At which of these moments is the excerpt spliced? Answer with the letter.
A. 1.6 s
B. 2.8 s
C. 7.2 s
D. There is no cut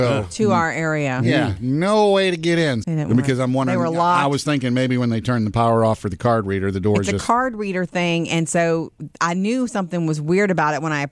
B